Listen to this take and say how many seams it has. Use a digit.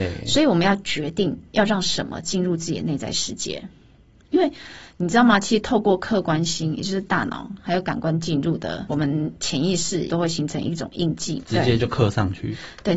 3